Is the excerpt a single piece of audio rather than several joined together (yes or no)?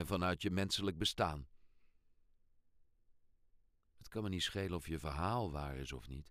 yes